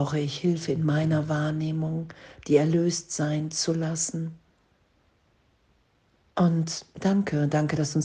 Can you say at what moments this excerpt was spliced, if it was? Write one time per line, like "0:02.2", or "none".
none